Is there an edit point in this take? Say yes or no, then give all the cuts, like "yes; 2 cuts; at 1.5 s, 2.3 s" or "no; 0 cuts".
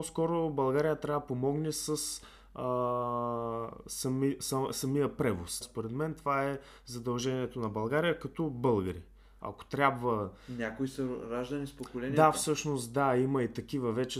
yes; 2 cuts; at 5.6 s, 9.4 s